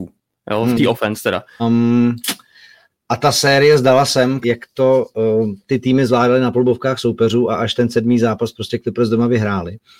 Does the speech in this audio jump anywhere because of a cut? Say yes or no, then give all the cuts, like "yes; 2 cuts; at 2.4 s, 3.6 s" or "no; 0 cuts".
yes; 2 cuts; at 1.6 s, 4.4 s